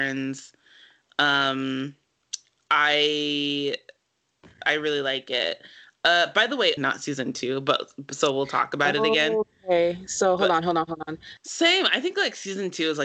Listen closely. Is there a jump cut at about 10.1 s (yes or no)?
no